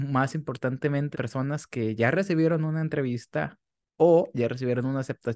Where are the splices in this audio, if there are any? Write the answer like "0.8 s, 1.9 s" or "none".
1.1 s